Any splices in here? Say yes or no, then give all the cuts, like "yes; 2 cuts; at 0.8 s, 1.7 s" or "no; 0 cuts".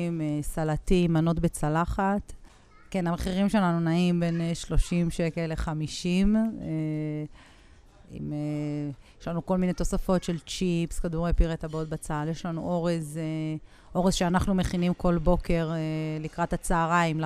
no; 0 cuts